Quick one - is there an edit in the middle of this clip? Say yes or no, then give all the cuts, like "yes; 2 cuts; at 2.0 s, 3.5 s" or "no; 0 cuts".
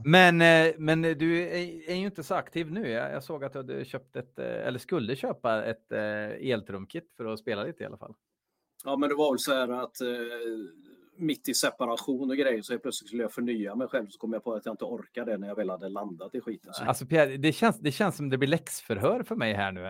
yes; 1 cut; at 16.8 s